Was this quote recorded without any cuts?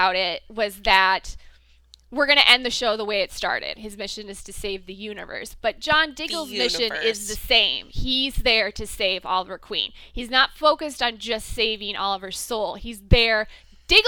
no; 1 cut; at 3.7 s

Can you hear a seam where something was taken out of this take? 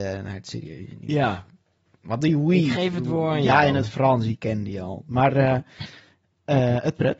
no; 0 cuts

